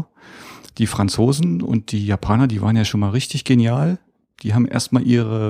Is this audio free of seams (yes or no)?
yes